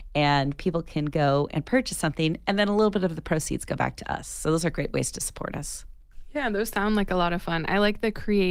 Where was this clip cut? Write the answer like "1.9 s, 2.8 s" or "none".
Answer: none